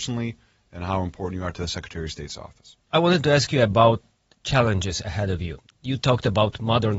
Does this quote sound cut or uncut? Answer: uncut